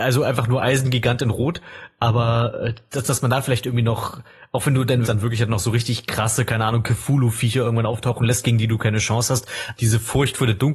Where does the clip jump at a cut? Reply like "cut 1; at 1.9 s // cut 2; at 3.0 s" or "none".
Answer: cut 1; at 5.0 s // cut 2; at 9.8 s